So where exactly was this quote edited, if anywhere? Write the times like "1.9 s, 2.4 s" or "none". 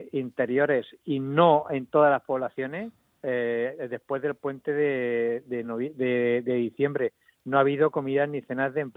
none

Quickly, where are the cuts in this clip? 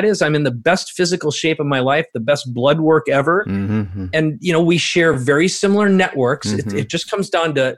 none

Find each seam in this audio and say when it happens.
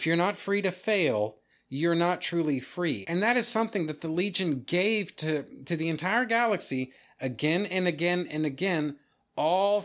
3.0 s

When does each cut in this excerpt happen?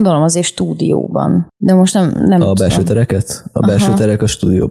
none

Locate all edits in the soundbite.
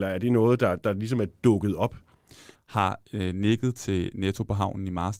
2.5 s

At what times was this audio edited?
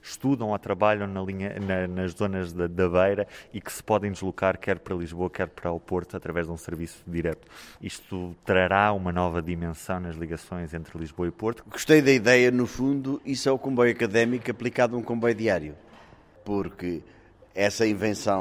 7.8 s, 11.6 s

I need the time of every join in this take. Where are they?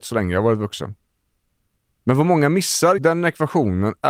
3.0 s

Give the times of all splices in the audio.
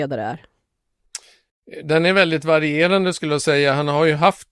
none

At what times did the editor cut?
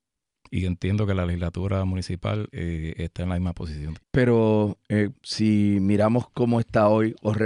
4.0 s, 5.1 s

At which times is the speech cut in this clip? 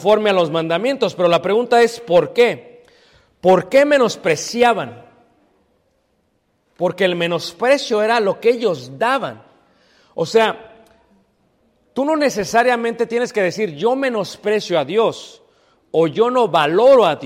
none

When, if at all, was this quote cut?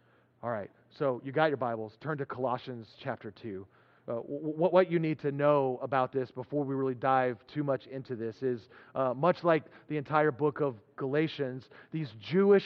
none

